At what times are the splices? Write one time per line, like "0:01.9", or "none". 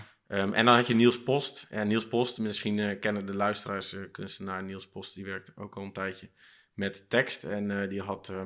none

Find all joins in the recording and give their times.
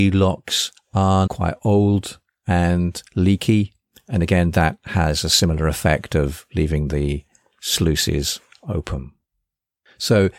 0:01.3

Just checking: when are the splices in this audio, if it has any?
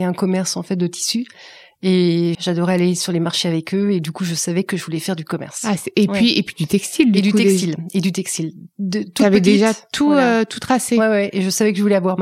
0:02.3

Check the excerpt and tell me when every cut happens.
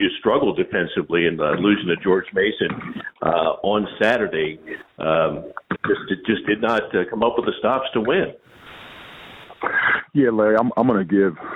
0:05.8

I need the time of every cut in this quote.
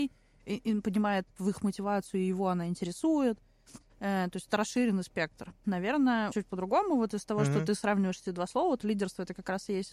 0:06.3
0:08.8

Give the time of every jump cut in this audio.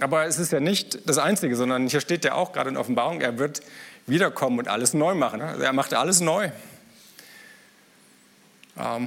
0:05.4

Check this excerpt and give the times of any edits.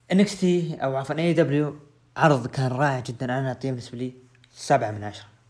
none

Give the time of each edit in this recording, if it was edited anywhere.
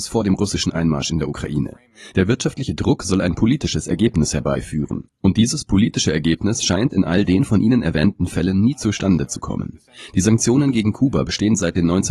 0:02.1

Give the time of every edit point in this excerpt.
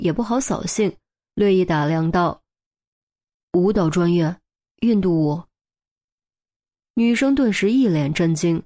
none

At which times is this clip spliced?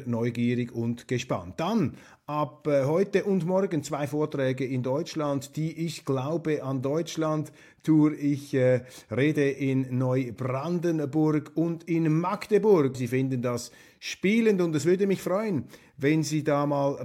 0:12.9

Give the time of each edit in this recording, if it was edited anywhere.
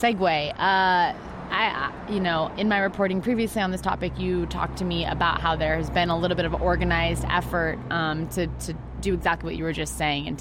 none

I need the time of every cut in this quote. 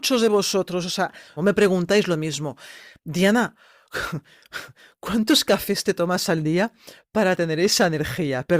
0:01.4

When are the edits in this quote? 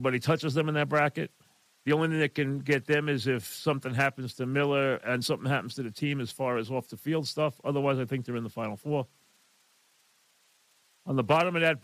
none

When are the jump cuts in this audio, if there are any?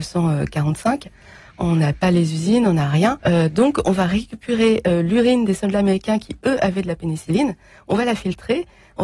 0:03.2

